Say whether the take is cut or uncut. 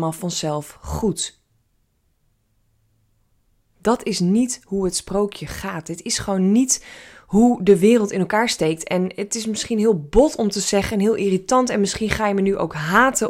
uncut